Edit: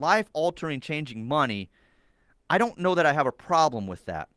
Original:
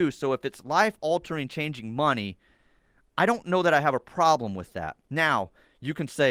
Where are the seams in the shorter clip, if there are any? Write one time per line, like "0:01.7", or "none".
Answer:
none